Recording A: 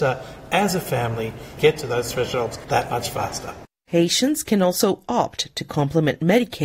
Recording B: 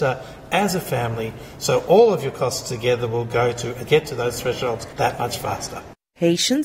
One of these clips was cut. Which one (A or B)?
A